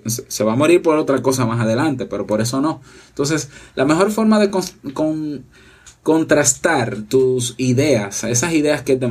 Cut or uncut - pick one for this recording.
uncut